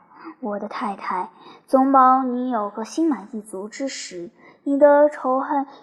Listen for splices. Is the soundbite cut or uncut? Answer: uncut